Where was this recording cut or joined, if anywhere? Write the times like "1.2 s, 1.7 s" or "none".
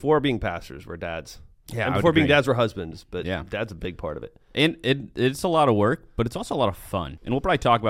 none